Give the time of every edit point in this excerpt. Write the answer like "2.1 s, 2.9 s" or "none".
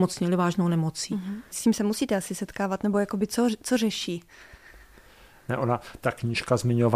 1.5 s